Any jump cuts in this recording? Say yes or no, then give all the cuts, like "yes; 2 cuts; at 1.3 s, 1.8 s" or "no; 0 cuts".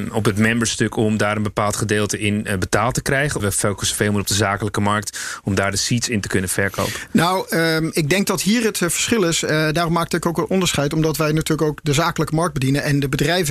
yes; 1 cut; at 3.4 s